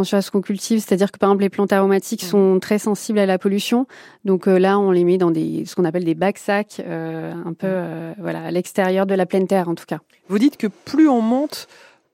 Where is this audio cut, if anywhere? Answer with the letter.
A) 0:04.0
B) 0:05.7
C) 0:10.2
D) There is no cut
D